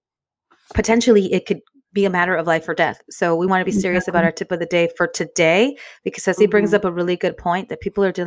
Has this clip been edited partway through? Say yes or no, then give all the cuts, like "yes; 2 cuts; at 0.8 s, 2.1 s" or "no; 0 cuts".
yes; 1 cut; at 3.5 s